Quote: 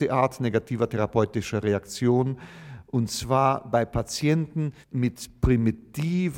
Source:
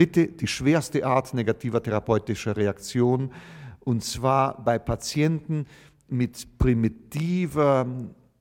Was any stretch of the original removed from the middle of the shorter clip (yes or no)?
yes